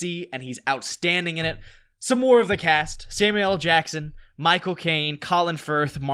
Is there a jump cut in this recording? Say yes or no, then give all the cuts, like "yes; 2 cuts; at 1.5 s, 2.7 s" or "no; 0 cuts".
no; 0 cuts